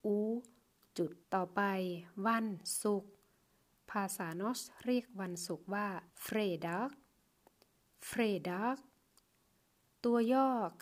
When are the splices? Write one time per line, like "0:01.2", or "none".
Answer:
0:01.2
0:06.1